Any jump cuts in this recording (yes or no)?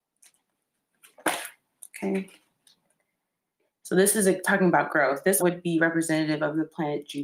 yes